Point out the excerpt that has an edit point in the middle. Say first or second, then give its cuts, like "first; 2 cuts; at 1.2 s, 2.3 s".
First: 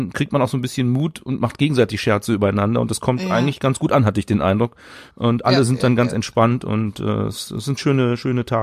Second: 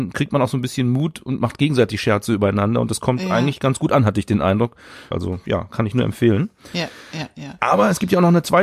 second; 1 cut; at 5.1 s